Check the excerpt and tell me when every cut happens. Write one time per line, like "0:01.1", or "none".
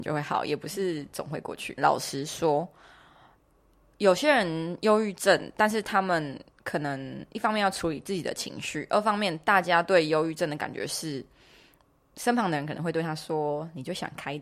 0:01.8